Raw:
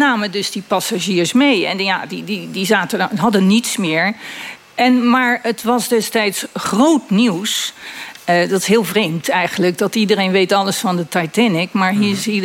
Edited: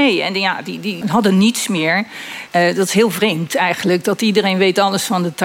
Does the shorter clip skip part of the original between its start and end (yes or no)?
yes